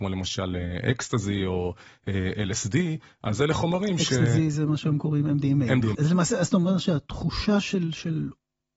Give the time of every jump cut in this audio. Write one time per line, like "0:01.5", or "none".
0:05.9